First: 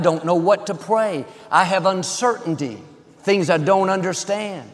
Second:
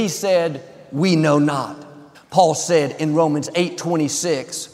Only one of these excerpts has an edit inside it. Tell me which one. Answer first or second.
second